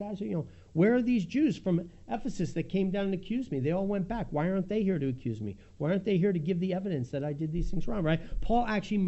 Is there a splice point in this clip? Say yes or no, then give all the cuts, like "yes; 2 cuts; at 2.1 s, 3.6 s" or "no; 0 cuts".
no; 0 cuts